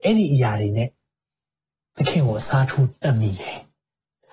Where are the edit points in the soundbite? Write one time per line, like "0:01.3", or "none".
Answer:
none

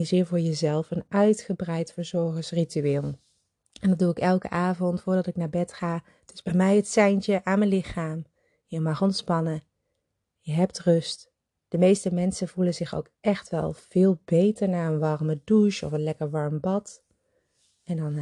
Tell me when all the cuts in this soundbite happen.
0:11.5

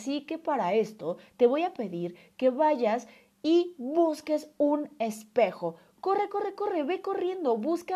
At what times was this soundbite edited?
none

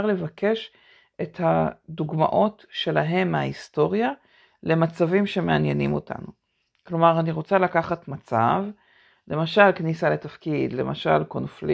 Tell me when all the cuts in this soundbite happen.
none

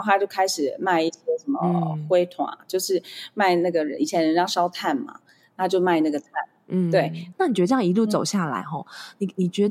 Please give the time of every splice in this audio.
0:07.3

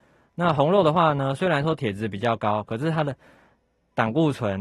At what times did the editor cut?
none

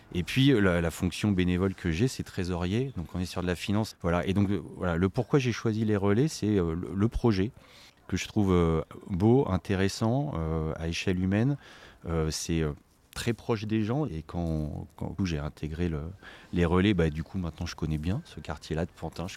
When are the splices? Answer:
0:03.9
0:14.1
0:15.2

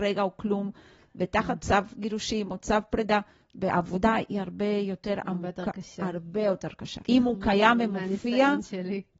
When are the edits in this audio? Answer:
0:07.0

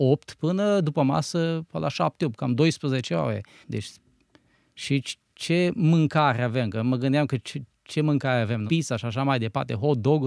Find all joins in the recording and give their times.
0:03.6
0:08.7

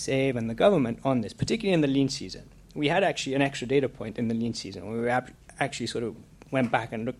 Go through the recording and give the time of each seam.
none

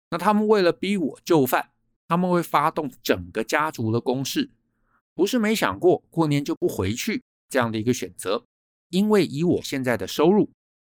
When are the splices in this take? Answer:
0:05.0

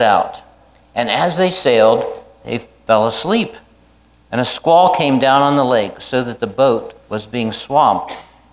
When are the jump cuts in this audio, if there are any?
none

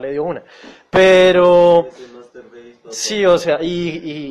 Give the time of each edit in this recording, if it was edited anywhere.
none

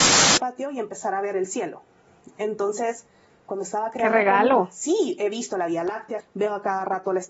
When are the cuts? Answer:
0:06.2

